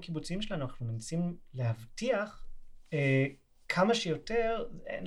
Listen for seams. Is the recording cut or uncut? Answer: uncut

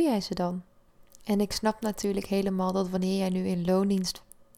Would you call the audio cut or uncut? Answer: uncut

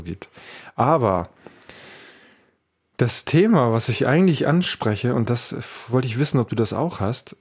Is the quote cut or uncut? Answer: uncut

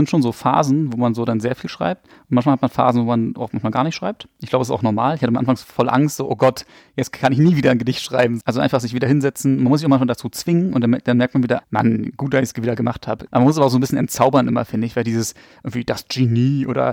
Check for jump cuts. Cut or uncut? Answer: cut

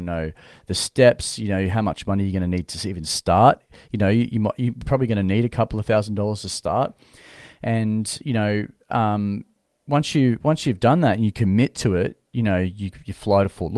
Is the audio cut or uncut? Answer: uncut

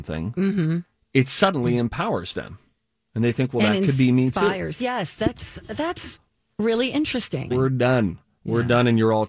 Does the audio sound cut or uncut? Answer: cut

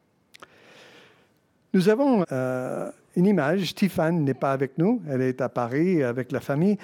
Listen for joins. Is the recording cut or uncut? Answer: cut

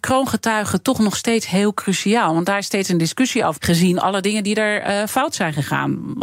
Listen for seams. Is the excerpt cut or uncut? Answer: cut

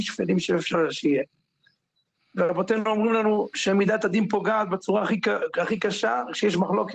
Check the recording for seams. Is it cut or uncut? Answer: uncut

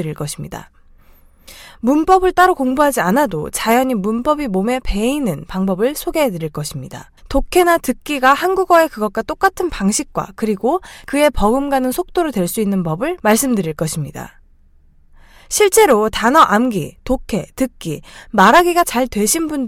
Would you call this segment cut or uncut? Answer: cut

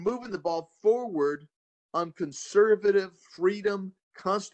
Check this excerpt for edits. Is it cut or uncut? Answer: uncut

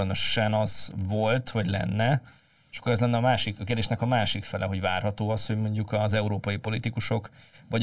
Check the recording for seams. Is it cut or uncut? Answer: uncut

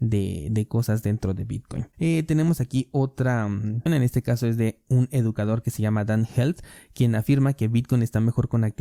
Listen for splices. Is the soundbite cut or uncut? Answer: cut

